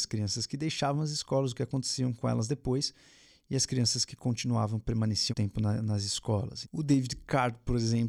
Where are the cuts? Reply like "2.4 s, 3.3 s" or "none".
5.3 s, 6.6 s